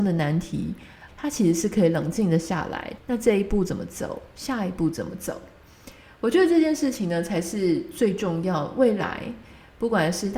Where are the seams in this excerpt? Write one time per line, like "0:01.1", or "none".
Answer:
0:01.1
0:03.0